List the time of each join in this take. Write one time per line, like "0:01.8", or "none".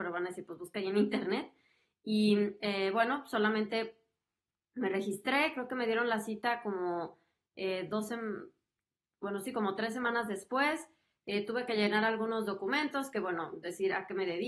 none

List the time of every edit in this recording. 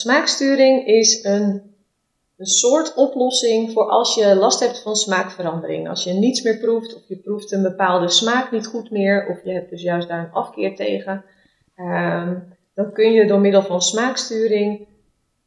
none

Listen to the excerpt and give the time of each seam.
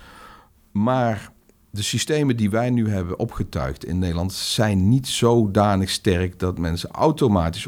none

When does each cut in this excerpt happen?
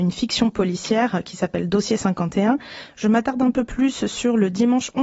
none

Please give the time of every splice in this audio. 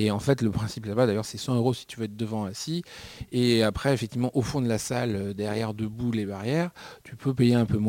none

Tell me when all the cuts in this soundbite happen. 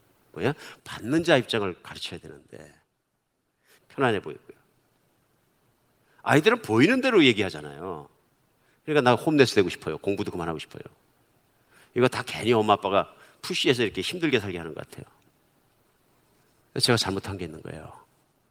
0:03.8

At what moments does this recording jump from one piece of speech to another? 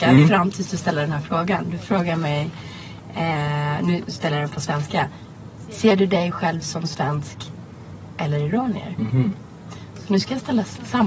none

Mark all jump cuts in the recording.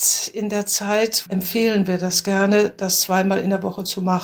0:01.3

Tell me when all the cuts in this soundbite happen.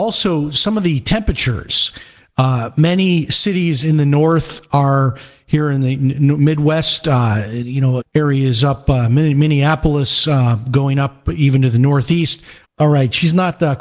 0:08.0
0:12.6

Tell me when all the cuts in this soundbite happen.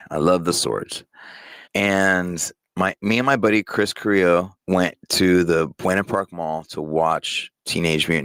0:01.6
0:04.6

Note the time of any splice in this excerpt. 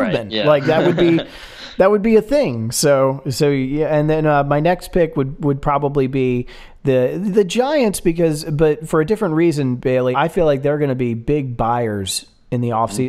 0:10.1

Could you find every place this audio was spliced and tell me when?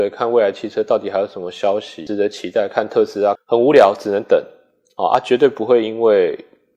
0:03.4

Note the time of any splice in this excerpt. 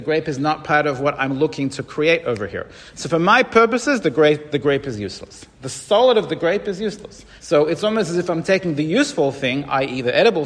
0:07.4

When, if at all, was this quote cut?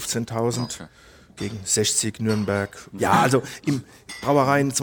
0:03.0

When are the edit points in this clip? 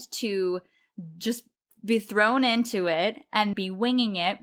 0:03.5

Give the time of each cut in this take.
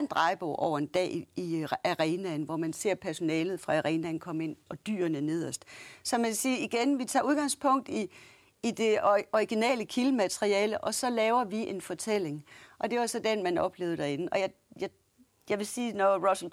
0:04.7

